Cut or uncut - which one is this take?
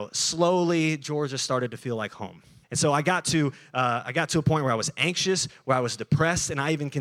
cut